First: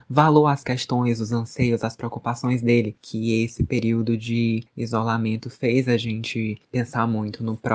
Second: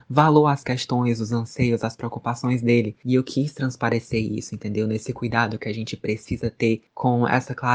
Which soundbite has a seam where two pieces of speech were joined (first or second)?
first